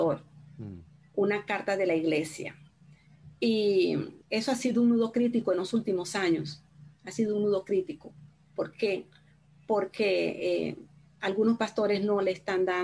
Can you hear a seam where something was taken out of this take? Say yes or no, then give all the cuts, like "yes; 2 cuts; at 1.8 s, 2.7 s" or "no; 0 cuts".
yes; 1 cut; at 4.2 s